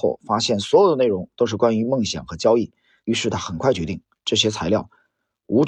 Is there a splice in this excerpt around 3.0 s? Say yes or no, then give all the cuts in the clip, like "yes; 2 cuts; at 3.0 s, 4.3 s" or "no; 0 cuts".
yes; 1 cut; at 3.0 s